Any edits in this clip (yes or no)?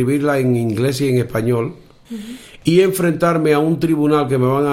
yes